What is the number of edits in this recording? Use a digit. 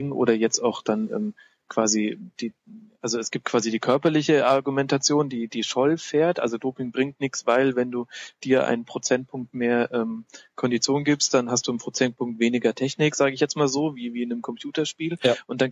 0